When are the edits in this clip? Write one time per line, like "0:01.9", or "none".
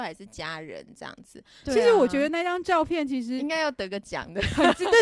0:01.6